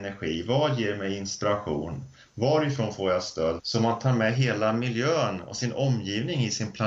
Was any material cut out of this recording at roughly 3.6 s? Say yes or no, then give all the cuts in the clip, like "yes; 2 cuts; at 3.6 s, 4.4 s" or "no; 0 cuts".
yes; 1 cut; at 3.6 s